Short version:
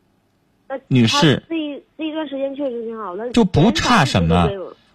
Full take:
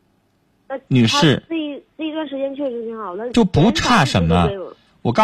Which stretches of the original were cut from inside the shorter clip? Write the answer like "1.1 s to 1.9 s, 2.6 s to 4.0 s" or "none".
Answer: none